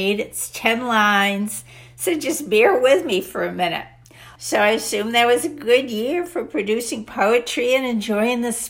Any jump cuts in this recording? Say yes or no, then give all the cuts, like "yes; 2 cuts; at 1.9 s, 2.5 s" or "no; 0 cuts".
yes; 1 cut; at 4.4 s